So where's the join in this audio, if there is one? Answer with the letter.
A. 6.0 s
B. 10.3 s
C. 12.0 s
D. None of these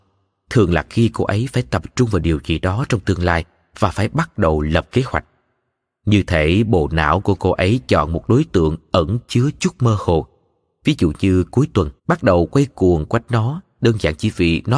C